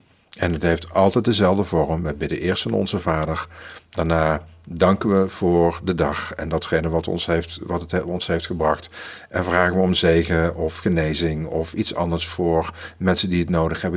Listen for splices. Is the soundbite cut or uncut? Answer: uncut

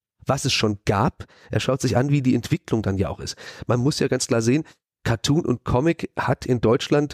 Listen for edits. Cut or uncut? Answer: uncut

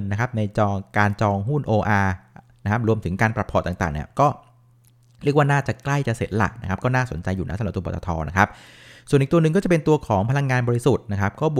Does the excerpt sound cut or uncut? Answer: uncut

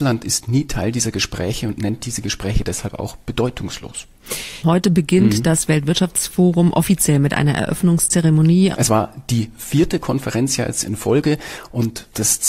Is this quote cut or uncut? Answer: cut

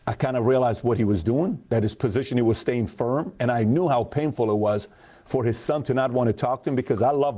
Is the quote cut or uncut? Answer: uncut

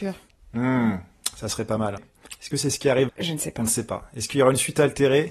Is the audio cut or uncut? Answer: cut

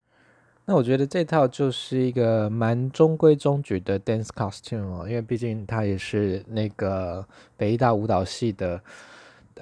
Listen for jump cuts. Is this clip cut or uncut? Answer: uncut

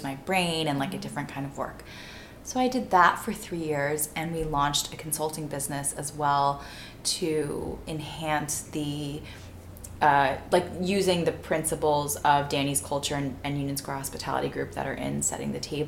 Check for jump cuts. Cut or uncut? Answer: uncut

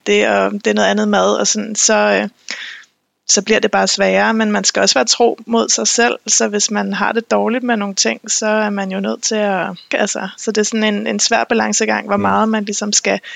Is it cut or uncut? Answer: cut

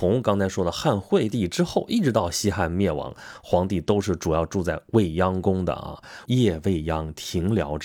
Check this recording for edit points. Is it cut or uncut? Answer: cut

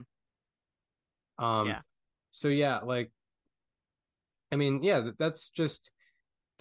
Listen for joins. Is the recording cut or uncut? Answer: cut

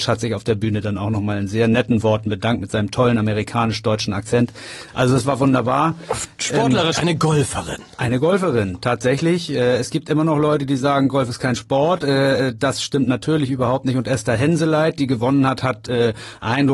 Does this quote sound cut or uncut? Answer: cut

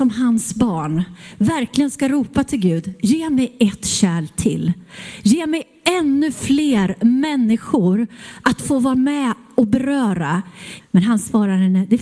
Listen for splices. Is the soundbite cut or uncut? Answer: cut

